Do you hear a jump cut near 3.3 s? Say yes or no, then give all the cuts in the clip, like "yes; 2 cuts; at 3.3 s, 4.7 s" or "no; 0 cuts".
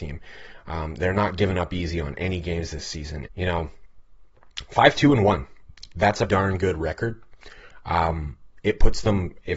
yes; 2 cuts; at 3.3 s, 6.3 s